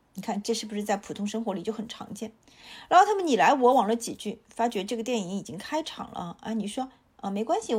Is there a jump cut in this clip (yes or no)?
no